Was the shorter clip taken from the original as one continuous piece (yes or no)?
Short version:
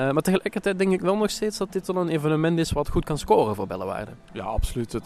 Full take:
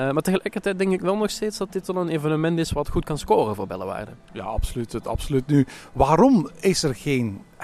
yes